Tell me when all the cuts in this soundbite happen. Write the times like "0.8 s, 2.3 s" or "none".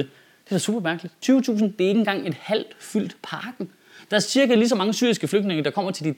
1.2 s